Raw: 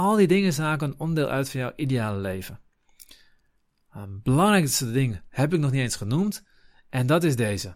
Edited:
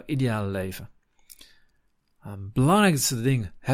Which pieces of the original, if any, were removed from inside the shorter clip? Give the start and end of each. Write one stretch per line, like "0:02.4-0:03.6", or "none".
none